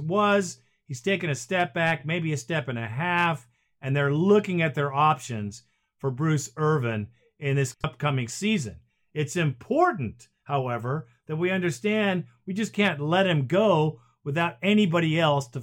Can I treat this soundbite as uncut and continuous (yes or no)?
yes